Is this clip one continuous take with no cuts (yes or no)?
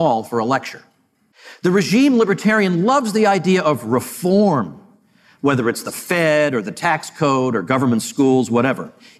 yes